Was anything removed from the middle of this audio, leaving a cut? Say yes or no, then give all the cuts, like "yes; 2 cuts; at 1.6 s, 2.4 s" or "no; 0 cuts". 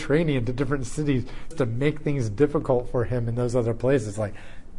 yes; 1 cut; at 1.5 s